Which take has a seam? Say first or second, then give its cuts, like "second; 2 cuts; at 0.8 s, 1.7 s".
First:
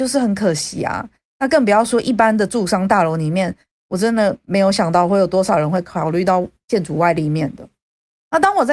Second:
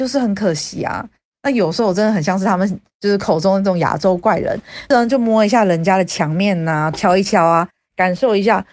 second; 3 cuts; at 1.3 s, 4.9 s, 6.9 s